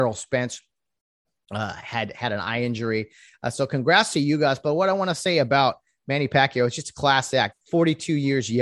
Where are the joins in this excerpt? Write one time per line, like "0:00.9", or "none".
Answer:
0:07.5